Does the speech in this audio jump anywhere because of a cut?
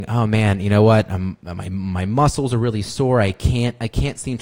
no; 0 cuts

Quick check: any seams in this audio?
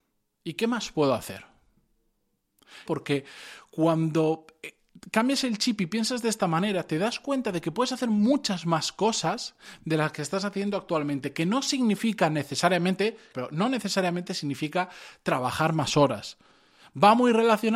yes; 2 cuts; at 2.9 s, 13.3 s

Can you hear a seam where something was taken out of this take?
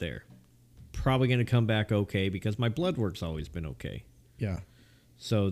no; 0 cuts

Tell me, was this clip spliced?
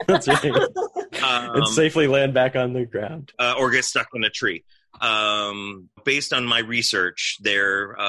yes; 2 cuts; at 3.3 s, 6.0 s

